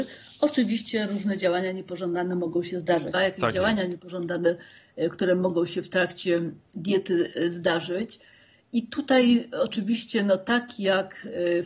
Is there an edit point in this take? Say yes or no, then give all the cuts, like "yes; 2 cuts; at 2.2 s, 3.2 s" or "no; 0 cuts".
yes; 1 cut; at 3.1 s